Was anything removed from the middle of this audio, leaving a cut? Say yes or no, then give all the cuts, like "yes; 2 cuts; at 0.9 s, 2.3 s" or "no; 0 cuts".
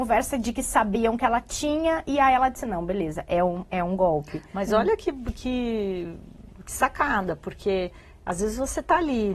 no; 0 cuts